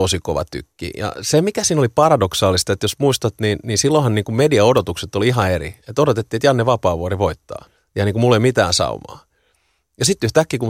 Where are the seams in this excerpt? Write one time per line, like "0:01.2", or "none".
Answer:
none